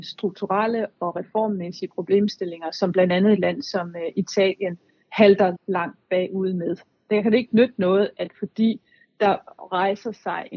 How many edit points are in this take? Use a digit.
1